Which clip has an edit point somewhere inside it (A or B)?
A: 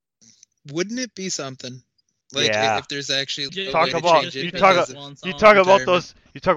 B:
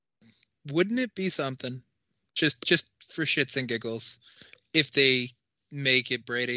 A